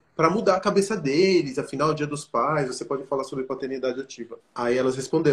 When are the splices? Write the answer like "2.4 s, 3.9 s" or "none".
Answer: 4.4 s